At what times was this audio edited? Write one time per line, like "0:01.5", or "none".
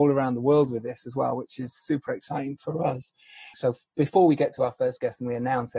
0:03.5